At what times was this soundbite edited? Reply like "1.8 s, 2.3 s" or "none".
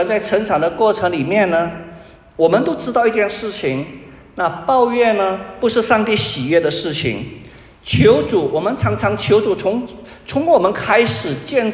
none